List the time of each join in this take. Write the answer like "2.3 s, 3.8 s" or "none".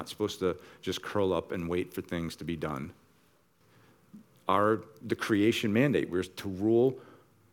none